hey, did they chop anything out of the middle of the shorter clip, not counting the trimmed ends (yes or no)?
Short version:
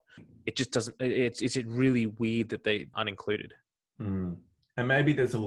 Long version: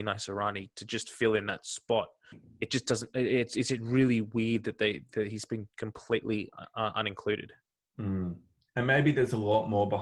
yes